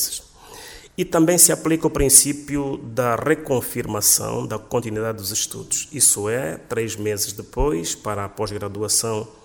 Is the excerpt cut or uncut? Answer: uncut